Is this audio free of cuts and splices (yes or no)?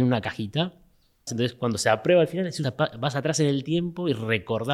no